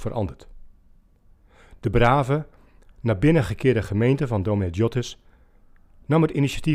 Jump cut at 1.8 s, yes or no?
no